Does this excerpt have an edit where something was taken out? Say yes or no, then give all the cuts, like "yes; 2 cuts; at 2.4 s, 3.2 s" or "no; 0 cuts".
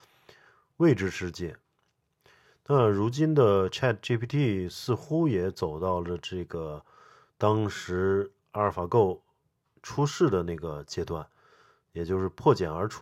no; 0 cuts